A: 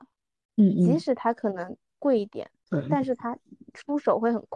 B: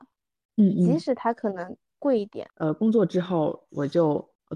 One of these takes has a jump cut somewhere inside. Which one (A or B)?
B